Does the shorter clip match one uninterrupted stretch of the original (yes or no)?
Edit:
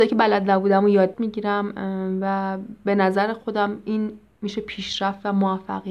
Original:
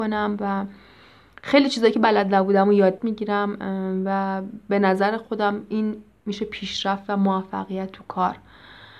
yes